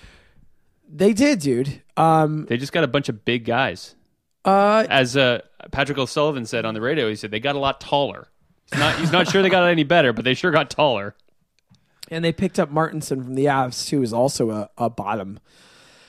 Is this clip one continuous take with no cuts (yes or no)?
yes